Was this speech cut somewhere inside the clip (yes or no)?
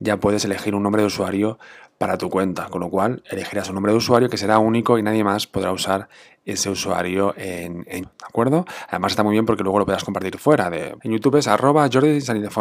yes